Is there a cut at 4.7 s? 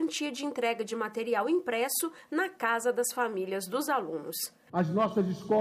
yes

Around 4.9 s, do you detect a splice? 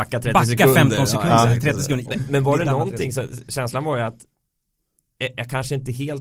no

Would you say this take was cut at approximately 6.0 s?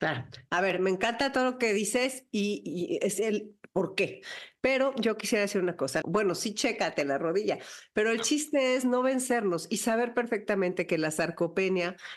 yes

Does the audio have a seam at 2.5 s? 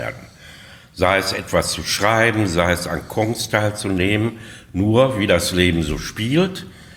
no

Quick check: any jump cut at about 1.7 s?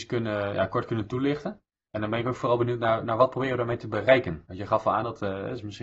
no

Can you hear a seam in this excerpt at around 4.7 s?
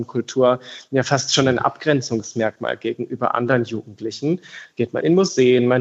no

